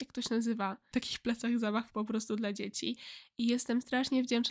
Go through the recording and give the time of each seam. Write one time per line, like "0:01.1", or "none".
0:00.9